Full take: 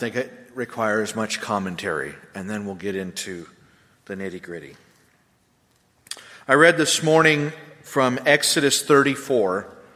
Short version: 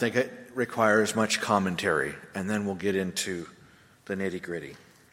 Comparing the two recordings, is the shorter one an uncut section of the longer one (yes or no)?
yes